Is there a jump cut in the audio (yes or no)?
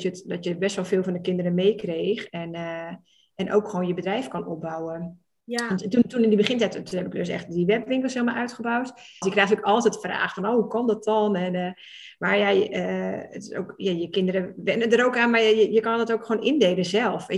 yes